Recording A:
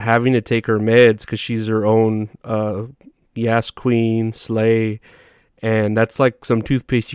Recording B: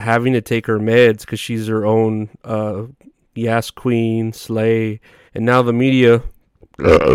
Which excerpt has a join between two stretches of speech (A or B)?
B